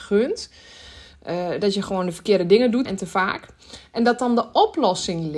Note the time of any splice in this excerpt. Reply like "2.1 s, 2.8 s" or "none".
1.1 s, 2.9 s